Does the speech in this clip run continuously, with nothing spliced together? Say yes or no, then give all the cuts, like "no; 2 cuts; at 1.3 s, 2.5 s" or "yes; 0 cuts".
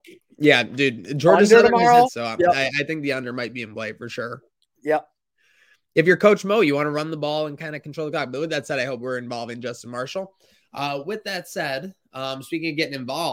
no; 1 cut; at 2.1 s